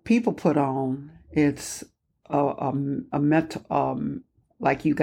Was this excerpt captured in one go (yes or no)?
yes